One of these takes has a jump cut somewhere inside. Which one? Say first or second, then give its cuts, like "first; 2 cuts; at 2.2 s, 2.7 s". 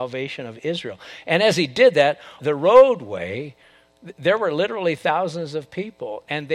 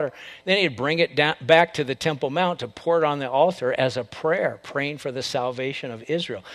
first; 1 cut; at 2.4 s